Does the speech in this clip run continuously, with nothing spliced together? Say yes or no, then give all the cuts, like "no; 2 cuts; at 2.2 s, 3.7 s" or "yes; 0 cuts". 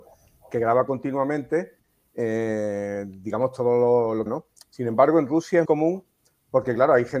no; 2 cuts; at 4.3 s, 5.6 s